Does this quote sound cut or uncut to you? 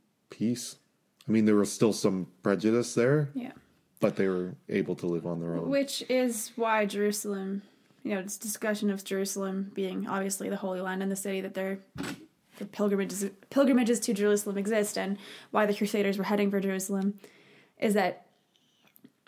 uncut